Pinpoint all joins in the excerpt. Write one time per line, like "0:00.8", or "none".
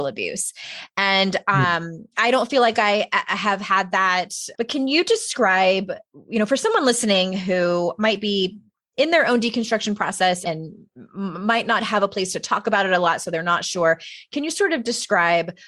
0:04.5
0:10.4